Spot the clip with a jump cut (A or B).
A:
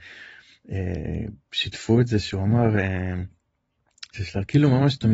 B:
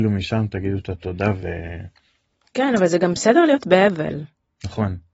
A